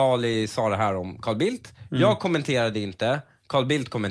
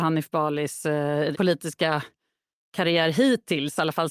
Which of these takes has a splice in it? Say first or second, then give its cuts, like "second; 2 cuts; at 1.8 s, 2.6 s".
second; 1 cut; at 1.3 s